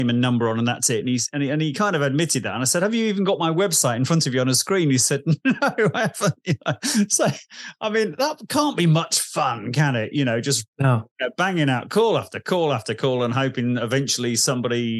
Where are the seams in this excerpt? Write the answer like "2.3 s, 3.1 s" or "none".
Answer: none